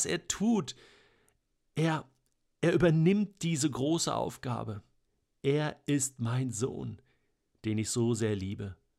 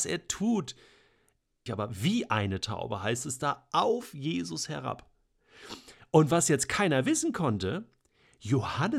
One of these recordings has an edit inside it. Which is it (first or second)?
second